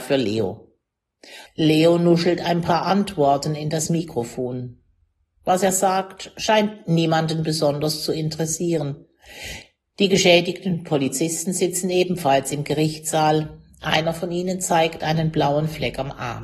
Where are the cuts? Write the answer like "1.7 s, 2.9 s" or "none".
1.5 s